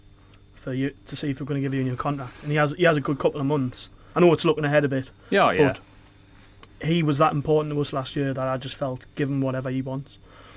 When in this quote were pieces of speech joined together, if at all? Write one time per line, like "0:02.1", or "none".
0:04.1